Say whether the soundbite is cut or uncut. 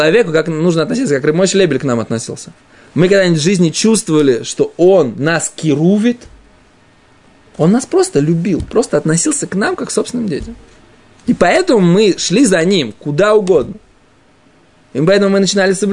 uncut